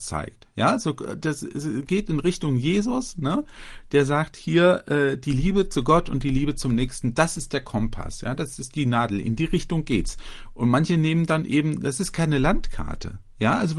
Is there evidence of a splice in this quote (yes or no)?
no